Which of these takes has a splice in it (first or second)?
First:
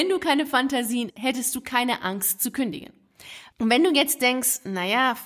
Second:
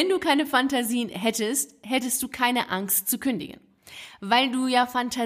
first